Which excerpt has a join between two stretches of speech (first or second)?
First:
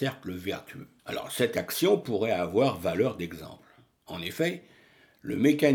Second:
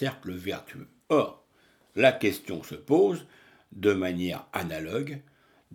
first